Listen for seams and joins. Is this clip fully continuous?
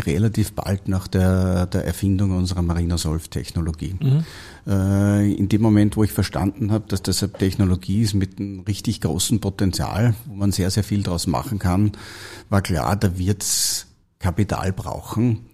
yes; 0 cuts

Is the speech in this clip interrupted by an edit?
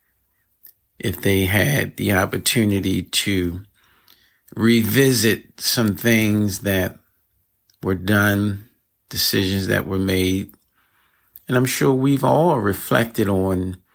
no; 0 cuts

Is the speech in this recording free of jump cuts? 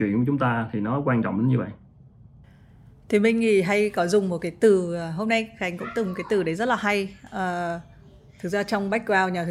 yes; 0 cuts

